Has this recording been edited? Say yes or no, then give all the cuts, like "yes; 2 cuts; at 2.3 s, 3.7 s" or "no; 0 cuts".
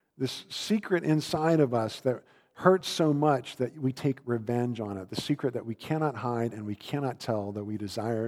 no; 0 cuts